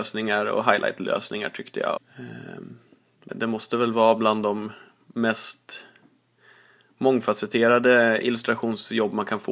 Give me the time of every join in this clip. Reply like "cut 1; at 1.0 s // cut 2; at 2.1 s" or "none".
cut 1; at 2.0 s // cut 2; at 3.3 s